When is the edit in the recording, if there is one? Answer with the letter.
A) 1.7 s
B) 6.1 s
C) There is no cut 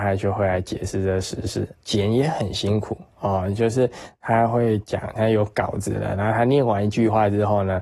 A